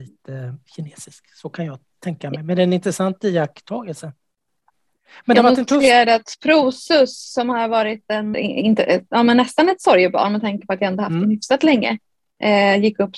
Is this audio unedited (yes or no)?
no